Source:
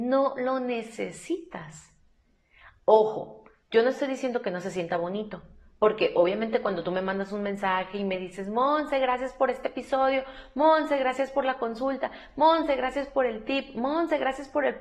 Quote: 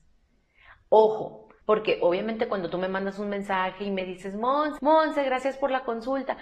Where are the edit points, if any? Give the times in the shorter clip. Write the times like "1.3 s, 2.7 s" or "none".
1.6 s, 4.8 s